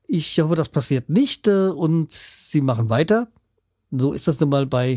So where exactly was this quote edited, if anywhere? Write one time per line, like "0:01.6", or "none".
0:03.7